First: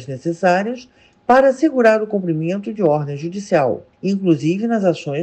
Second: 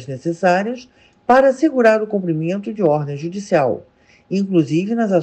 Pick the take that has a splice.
first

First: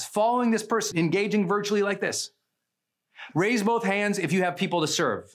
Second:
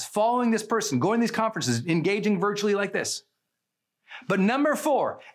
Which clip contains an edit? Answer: first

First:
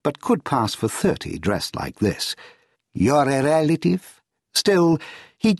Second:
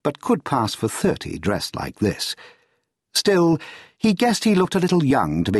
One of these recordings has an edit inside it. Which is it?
first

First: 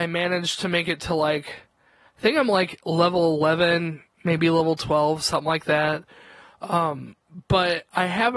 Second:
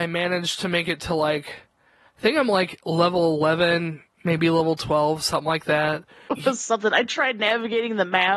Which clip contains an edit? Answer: second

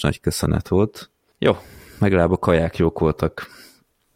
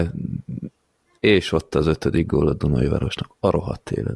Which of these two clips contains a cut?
first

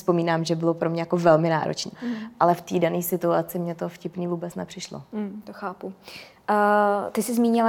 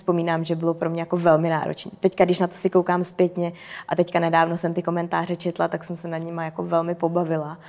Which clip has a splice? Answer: first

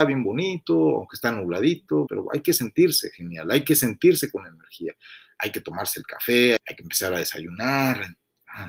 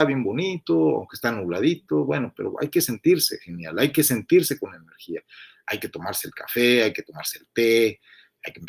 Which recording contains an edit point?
first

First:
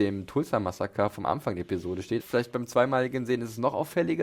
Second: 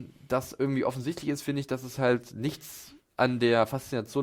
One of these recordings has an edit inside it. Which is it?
first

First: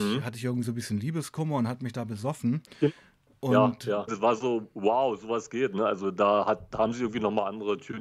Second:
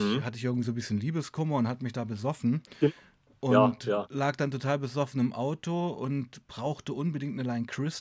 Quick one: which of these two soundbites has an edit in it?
first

